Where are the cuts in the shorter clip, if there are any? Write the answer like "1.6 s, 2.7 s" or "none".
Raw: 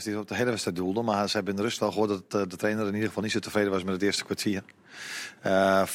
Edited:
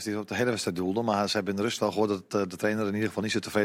none